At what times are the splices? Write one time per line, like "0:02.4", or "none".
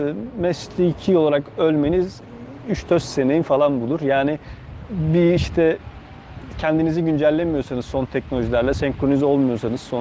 none